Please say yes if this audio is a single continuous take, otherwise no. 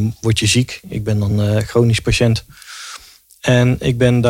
yes